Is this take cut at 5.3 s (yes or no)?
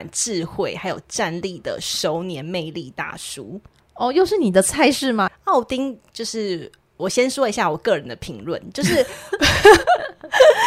yes